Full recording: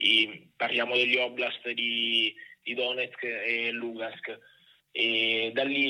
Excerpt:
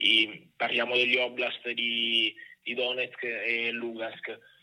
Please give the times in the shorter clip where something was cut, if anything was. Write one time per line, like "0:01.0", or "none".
none